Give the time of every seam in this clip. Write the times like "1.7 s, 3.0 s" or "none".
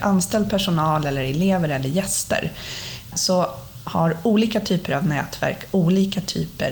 3.1 s